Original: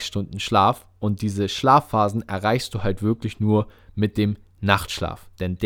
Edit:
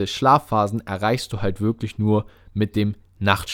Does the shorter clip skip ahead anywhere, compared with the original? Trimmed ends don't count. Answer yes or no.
no